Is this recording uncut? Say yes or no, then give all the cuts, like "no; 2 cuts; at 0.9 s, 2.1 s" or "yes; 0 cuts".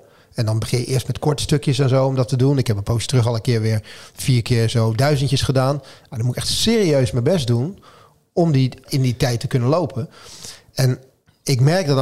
no; 1 cut; at 8.9 s